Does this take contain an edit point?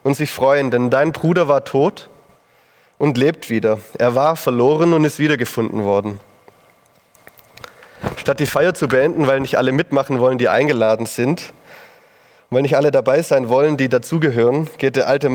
no; 0 cuts

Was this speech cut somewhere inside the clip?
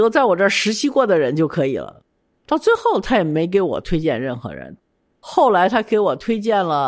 no; 0 cuts

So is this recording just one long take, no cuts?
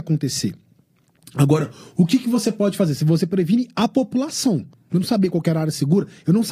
no; 1 cut; at 4.7 s

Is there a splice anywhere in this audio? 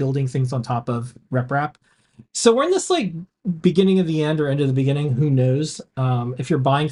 no; 0 cuts

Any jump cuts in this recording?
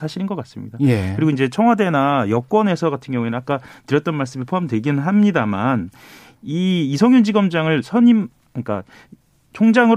no; 0 cuts

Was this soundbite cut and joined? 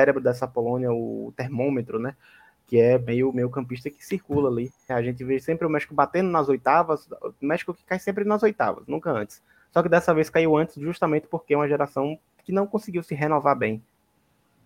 yes; 1 cut; at 4.9 s

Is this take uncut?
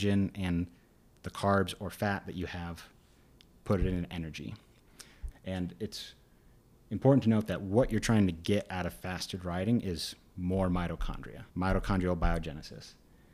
no; 2 cuts; at 5.3 s, 11.5 s

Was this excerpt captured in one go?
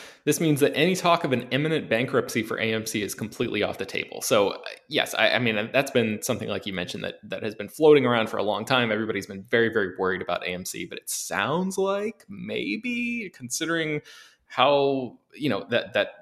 yes; 0 cuts

